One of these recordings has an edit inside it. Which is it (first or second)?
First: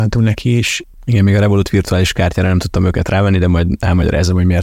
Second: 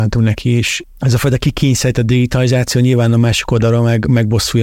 first